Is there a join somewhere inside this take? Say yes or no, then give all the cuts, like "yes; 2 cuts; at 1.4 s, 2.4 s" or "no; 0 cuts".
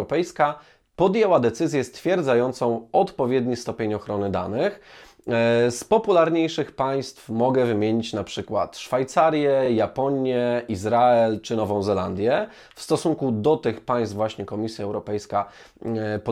no; 0 cuts